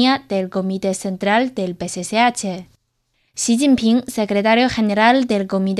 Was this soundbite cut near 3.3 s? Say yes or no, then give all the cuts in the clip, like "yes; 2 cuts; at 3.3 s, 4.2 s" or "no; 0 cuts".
yes; 1 cut; at 3.3 s